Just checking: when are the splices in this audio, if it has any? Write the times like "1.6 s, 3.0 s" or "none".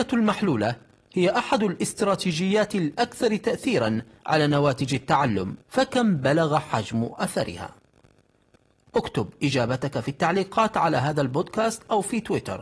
5.6 s